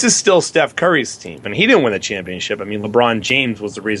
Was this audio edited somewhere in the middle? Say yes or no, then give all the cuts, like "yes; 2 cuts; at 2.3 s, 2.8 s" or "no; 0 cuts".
yes; 1 cut; at 1.4 s